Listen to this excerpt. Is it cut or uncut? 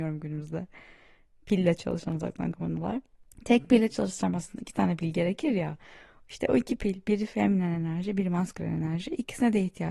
uncut